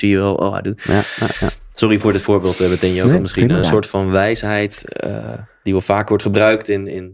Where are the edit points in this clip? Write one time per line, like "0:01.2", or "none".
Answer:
0:03.6